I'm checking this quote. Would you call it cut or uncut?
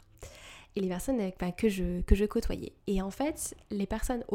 uncut